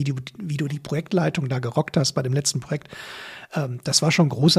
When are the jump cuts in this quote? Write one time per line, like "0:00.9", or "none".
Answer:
none